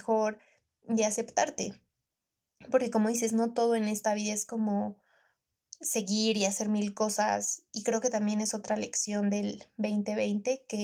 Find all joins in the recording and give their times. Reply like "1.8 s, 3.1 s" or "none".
7.7 s